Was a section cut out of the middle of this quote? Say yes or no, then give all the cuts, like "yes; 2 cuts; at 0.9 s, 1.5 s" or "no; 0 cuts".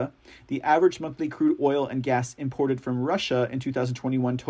no; 0 cuts